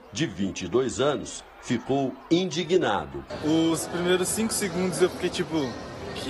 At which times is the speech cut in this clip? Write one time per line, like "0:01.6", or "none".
none